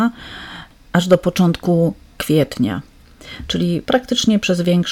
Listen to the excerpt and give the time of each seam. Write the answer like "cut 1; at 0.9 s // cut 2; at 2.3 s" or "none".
none